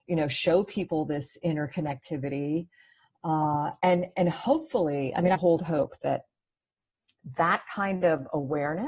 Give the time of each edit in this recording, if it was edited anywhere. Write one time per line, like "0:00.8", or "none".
0:04.1
0:05.3